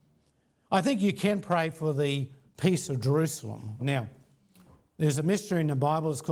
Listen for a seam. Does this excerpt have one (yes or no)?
yes